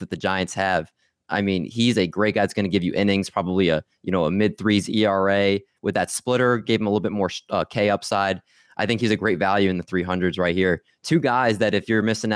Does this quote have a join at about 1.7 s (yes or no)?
no